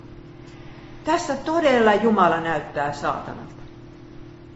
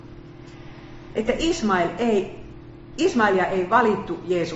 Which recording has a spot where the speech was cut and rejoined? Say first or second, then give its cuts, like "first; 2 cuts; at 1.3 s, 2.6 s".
first; 1 cut; at 1.0 s